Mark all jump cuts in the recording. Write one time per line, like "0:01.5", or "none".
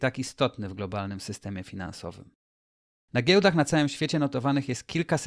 none